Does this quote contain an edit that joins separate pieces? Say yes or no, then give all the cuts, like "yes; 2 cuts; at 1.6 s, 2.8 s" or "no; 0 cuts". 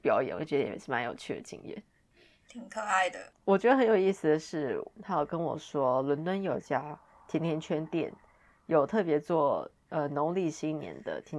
yes; 2 cuts; at 3.3 s, 5.0 s